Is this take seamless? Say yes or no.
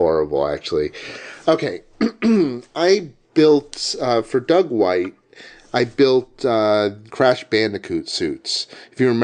no